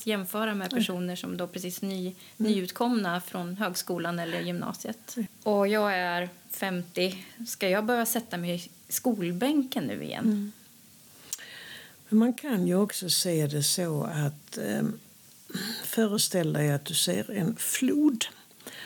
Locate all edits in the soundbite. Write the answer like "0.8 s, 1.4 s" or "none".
5.3 s